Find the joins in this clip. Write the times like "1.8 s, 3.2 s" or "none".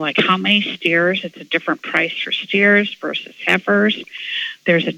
none